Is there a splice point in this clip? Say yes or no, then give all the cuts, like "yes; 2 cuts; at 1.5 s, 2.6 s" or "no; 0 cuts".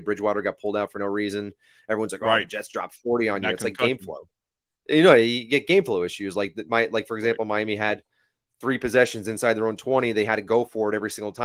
no; 0 cuts